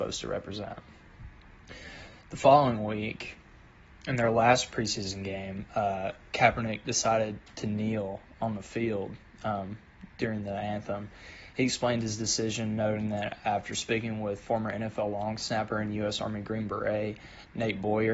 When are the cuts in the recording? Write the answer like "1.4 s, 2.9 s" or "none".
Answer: none